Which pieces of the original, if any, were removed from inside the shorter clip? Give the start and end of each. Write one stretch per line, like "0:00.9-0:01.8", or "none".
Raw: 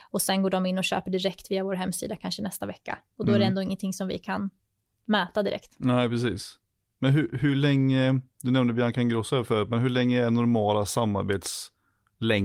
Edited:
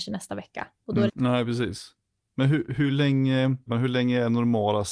0:03.4-0:05.7
0:08.3-0:09.7